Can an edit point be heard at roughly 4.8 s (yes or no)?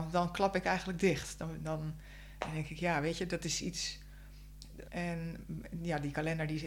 yes